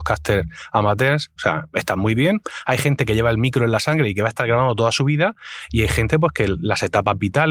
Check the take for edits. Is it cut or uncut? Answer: cut